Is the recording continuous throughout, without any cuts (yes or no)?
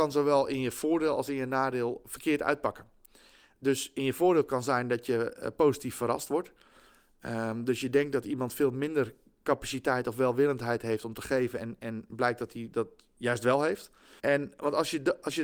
no